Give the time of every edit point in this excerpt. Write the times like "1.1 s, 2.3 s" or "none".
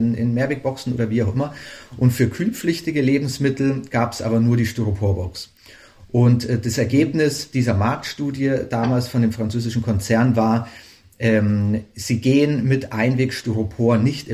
none